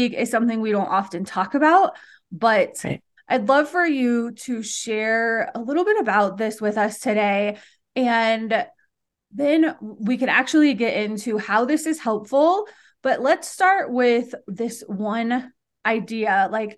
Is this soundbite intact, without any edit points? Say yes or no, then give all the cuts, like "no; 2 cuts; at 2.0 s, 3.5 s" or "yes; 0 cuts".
no; 1 cut; at 3.2 s